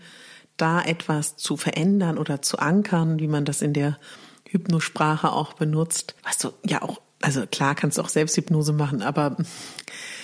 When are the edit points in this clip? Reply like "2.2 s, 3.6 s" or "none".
6.2 s